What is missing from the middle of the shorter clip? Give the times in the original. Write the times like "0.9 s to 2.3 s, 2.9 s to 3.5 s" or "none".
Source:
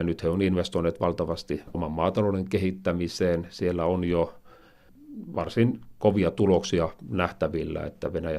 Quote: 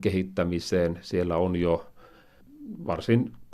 none